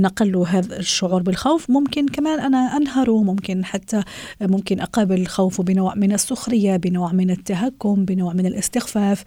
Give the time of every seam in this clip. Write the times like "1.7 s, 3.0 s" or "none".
none